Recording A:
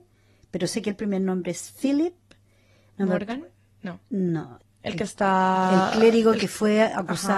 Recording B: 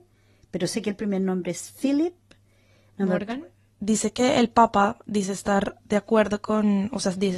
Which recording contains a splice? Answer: B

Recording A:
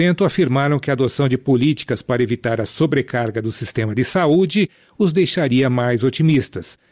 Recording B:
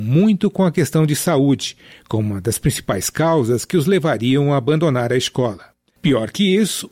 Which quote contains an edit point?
B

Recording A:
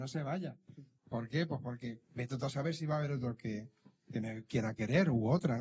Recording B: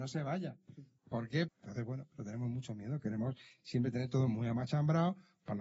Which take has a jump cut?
B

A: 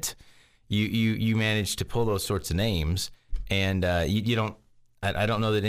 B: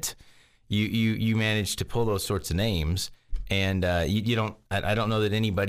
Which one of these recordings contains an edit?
B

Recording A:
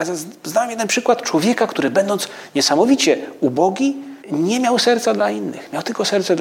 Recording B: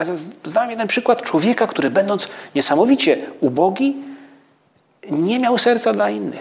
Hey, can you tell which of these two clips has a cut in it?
A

